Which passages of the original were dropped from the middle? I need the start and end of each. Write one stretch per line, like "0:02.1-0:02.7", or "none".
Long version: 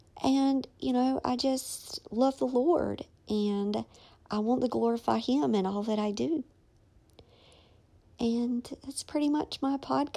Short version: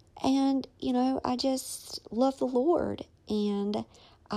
none

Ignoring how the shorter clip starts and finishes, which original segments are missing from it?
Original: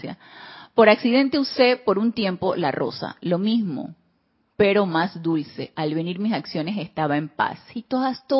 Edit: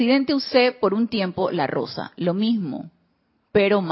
none

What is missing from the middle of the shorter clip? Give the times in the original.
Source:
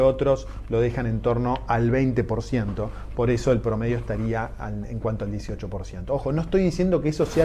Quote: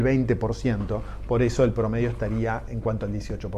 0:04.6-0:04.9

